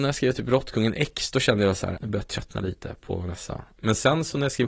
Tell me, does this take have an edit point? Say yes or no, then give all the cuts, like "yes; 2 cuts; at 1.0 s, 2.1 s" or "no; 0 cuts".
yes; 1 cut; at 2.0 s